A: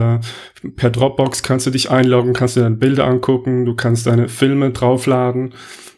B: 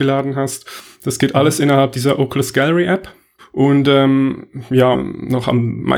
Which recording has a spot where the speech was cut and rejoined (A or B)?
B